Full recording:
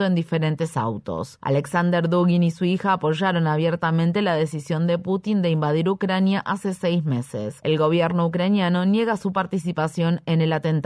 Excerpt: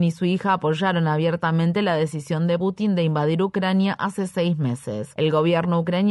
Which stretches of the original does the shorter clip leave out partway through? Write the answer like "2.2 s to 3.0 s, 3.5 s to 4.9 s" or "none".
5.0 s to 5.1 s